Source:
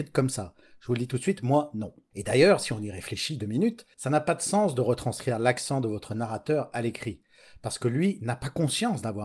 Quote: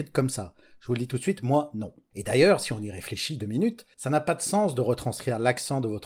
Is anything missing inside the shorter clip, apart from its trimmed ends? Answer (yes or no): no